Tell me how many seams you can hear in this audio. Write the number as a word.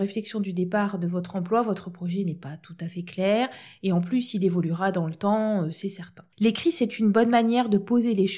one